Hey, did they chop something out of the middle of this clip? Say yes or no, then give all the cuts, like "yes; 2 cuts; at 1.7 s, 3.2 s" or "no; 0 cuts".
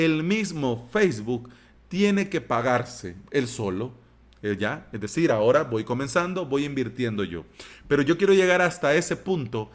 no; 0 cuts